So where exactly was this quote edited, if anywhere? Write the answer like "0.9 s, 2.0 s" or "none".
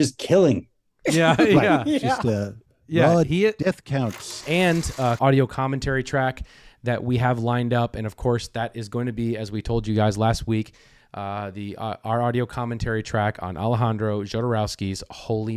5.2 s